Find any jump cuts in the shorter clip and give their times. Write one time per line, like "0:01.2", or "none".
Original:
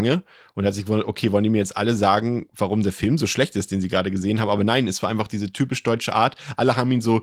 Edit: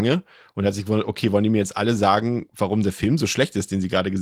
none